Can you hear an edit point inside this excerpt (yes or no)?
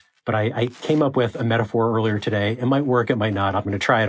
no